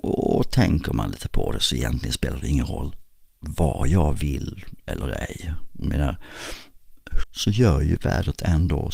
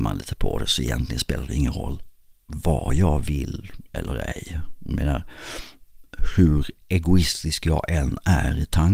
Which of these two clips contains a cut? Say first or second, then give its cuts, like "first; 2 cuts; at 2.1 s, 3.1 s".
first; 1 cut; at 7.2 s